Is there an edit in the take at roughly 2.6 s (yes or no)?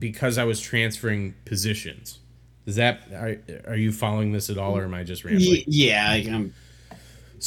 no